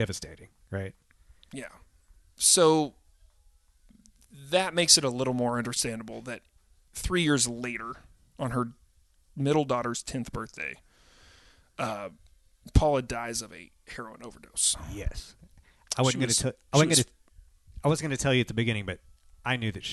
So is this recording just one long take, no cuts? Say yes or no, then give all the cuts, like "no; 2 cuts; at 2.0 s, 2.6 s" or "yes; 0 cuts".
yes; 0 cuts